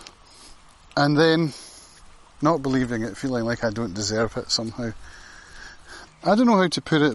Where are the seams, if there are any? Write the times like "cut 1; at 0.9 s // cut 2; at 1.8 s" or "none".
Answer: cut 1; at 6.1 s